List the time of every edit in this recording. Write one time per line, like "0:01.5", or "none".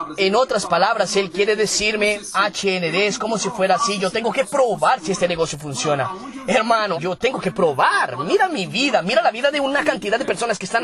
0:06.9